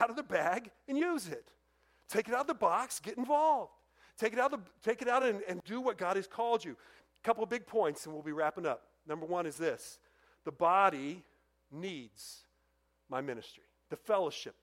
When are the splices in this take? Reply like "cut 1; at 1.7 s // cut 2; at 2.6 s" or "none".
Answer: none